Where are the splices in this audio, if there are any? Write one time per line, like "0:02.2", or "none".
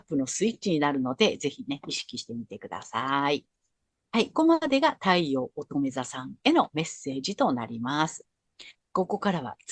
0:04.3